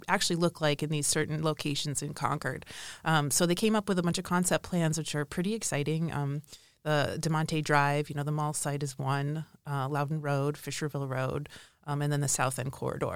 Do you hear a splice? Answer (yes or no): no